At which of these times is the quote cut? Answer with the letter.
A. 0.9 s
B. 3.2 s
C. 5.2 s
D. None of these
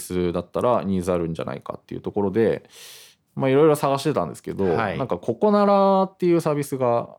D